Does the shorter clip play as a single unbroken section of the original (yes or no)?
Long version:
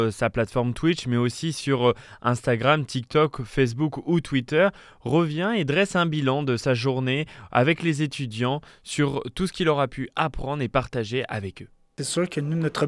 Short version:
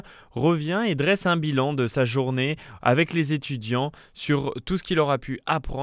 yes